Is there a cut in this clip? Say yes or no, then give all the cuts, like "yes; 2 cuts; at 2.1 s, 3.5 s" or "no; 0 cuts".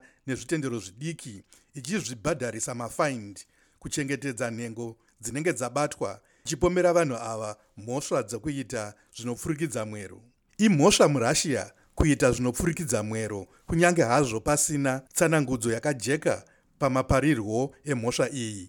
yes; 1 cut; at 15.1 s